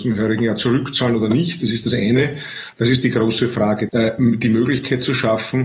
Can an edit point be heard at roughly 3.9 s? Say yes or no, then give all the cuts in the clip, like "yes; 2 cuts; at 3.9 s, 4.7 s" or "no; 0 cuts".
yes; 2 cuts; at 2.7 s, 3.9 s